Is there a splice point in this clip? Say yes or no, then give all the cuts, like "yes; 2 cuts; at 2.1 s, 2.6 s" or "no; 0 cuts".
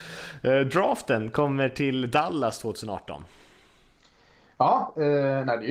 no; 0 cuts